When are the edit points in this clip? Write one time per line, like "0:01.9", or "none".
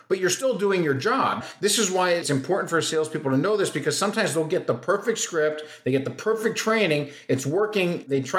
none